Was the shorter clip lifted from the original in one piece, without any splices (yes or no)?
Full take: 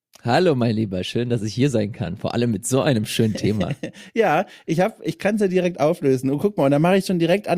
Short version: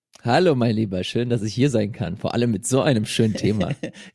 yes